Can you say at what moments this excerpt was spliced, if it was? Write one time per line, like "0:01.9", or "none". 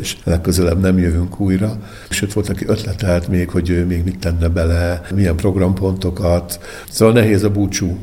none